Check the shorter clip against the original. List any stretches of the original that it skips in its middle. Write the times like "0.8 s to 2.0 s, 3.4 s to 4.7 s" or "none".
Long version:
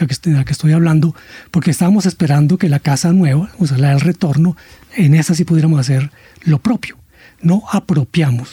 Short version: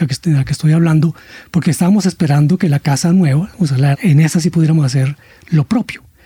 3.9 s to 4.9 s